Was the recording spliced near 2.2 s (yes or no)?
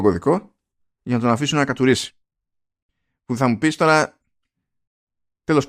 no